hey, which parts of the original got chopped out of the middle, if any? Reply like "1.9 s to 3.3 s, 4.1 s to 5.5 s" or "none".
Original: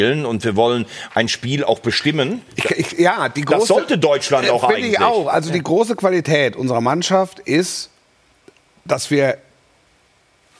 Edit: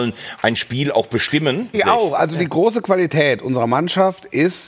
2.5 s to 4.9 s